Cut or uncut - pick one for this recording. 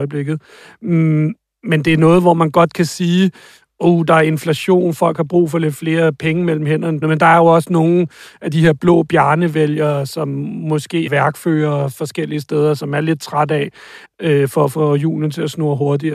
cut